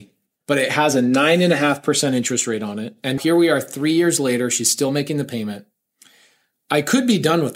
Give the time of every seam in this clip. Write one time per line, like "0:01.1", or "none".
0:03.2